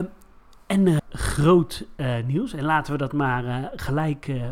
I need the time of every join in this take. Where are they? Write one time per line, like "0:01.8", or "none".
0:01.0